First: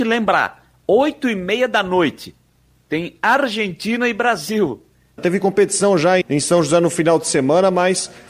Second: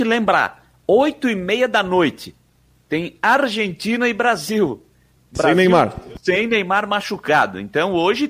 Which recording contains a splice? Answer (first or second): first